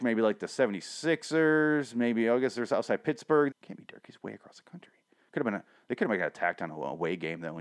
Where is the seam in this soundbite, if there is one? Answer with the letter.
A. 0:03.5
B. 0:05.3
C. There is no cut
A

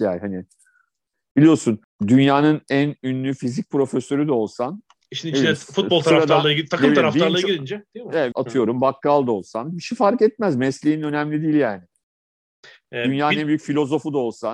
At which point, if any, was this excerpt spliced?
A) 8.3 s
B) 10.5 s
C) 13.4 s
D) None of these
A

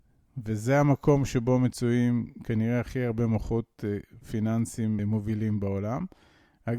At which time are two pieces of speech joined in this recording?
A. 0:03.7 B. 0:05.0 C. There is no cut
B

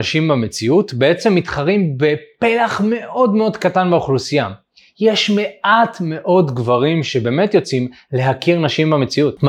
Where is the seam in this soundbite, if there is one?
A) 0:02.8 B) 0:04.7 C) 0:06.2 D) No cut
D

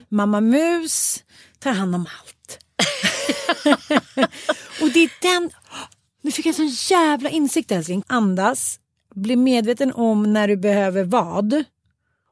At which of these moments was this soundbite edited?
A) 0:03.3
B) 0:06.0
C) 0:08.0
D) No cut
C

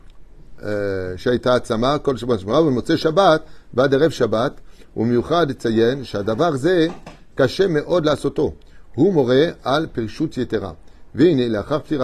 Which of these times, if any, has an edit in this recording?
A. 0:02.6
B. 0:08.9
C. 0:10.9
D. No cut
D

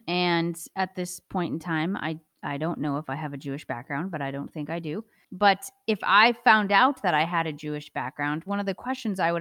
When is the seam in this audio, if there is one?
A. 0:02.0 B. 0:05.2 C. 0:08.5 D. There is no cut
C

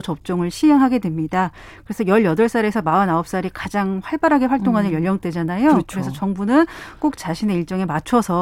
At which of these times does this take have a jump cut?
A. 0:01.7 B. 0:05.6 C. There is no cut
C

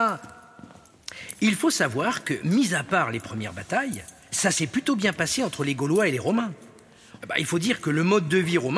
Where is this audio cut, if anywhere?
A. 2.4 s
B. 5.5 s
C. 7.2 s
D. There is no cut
C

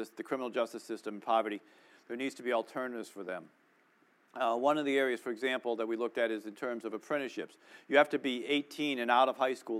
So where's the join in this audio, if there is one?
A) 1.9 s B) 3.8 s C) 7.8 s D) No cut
A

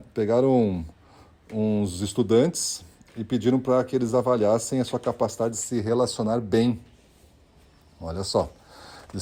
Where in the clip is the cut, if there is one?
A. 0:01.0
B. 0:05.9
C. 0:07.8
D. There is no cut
D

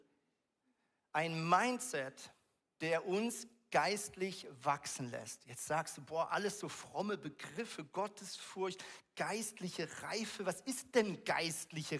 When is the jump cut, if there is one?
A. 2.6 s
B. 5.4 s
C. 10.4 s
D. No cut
A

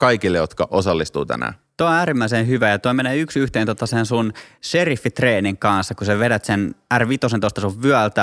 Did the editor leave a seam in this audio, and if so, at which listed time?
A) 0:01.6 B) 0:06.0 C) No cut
C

